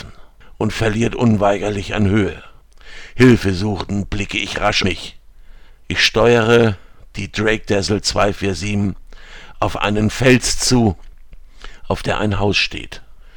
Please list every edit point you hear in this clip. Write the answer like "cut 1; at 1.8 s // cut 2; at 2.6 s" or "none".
cut 1; at 4.8 s